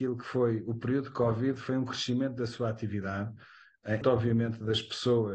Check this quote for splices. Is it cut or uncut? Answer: cut